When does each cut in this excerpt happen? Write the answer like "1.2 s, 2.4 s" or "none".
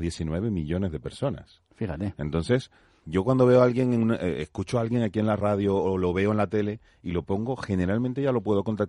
none